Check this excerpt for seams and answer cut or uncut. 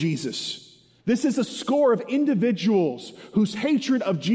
cut